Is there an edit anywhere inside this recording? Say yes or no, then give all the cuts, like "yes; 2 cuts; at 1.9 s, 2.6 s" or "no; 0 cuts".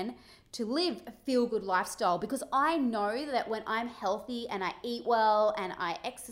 no; 0 cuts